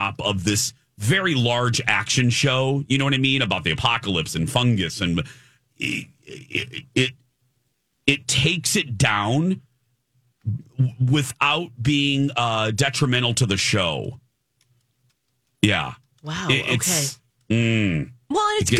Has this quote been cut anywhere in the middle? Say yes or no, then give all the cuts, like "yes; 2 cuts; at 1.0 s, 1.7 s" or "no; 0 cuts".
no; 0 cuts